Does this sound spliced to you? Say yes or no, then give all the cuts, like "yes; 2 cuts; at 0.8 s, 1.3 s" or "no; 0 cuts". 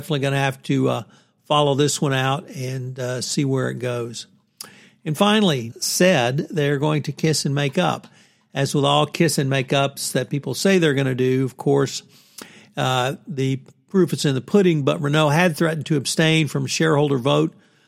yes; 1 cut; at 5.7 s